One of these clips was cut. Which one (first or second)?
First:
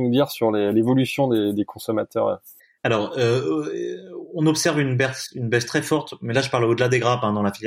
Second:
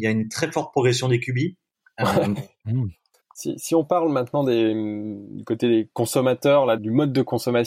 second